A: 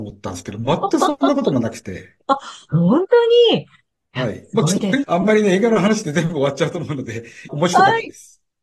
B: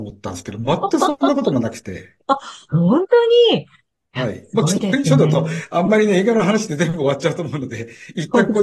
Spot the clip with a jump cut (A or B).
A